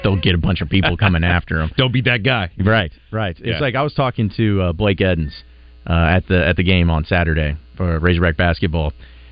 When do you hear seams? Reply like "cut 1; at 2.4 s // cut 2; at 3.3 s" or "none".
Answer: none